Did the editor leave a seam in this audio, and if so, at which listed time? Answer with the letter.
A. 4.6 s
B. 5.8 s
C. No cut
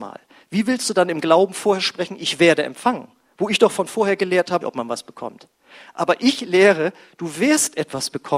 A